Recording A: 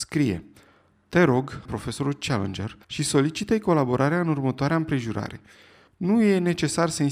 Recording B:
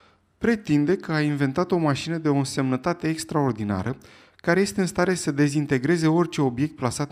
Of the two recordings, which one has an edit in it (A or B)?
A